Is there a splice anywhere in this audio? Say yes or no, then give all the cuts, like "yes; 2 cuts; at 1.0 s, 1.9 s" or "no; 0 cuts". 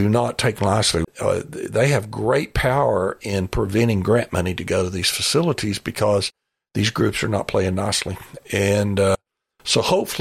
yes; 1 cut; at 1.0 s